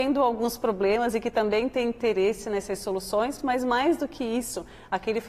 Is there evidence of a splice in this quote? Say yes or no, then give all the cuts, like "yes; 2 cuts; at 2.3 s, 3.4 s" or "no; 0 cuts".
no; 0 cuts